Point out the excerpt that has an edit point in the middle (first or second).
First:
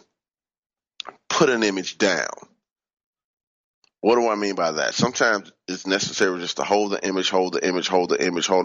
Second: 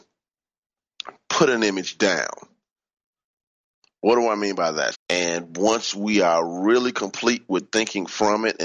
second